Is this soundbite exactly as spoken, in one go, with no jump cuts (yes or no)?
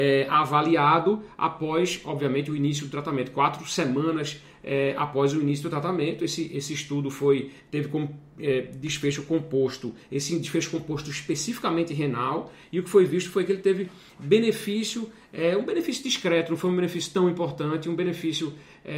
yes